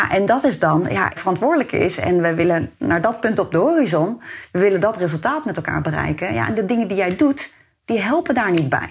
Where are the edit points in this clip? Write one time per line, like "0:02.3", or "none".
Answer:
0:01.2